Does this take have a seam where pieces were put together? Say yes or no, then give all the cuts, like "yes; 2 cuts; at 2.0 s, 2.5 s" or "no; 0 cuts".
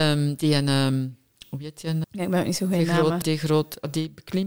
yes; 2 cuts; at 2.0 s, 3.2 s